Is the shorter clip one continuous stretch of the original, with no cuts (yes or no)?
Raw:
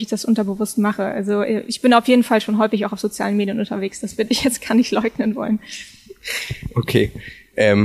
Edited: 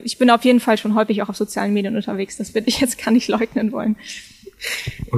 yes